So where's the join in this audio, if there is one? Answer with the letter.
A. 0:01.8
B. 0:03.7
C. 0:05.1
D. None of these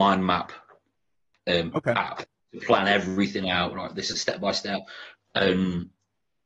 C